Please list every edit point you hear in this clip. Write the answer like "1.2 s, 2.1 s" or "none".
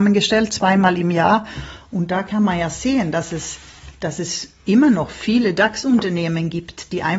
none